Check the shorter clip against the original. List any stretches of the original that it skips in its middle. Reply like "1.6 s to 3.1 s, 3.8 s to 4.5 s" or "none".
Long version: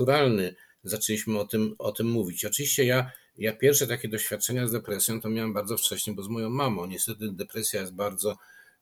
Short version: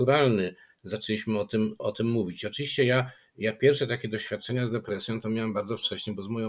none